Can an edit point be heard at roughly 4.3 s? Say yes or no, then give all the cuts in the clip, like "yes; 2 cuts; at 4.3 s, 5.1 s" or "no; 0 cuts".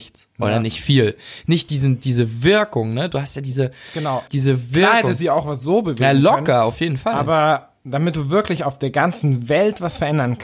yes; 1 cut; at 4.3 s